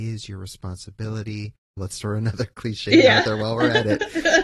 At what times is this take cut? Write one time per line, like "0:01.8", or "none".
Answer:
0:01.8